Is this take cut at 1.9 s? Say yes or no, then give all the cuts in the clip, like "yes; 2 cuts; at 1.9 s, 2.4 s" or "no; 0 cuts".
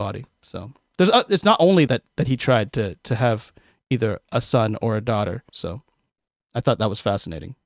yes; 2 cuts; at 1.9 s, 5.5 s